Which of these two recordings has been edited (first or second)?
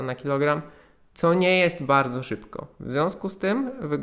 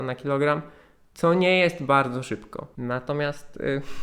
second